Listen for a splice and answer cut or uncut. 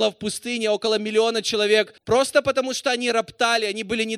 cut